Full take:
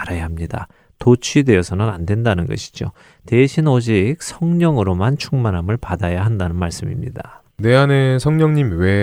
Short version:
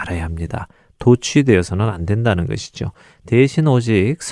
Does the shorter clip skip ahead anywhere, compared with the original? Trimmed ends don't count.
no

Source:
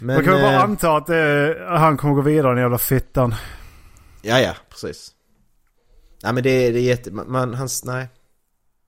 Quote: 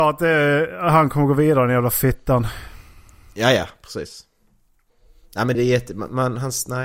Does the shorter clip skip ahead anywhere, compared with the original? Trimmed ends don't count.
yes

